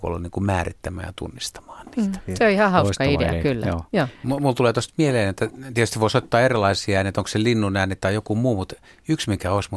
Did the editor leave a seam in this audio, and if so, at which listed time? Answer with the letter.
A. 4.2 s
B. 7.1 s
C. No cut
A